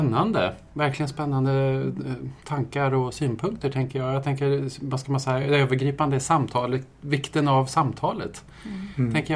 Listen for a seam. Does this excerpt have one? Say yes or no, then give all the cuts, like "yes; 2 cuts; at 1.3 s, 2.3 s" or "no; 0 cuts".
no; 0 cuts